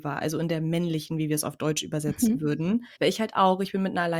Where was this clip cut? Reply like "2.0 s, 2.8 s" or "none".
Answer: 3.0 s